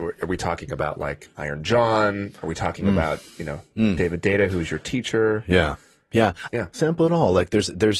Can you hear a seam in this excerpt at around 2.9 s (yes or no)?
no